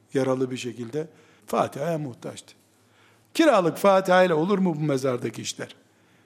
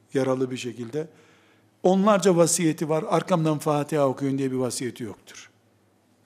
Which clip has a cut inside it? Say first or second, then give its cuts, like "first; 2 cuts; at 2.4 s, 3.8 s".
first; 2 cuts; at 1.4 s, 3.2 s